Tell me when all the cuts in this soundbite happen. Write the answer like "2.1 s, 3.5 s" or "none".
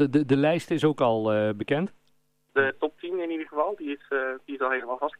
2.5 s